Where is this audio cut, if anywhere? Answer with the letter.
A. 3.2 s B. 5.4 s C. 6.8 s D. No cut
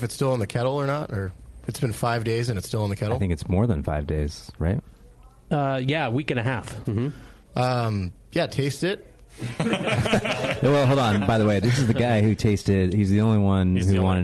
C